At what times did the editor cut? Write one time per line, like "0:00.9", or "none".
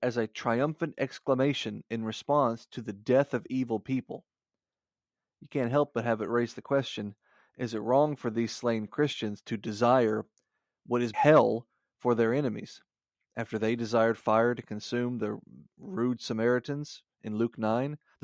0:11.1
0:13.3